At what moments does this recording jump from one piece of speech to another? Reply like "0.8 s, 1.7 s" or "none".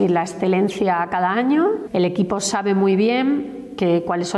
1.9 s